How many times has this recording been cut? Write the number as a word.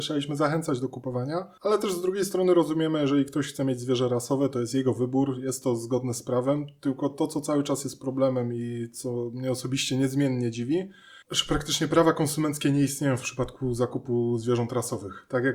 two